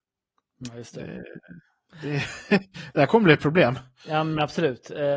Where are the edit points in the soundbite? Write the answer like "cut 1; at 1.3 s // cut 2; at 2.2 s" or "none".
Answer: none